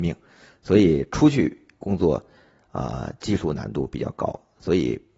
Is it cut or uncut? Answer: uncut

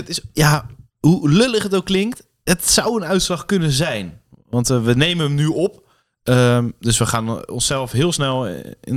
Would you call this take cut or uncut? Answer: uncut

